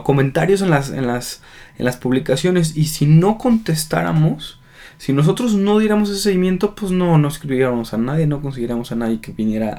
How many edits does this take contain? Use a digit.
0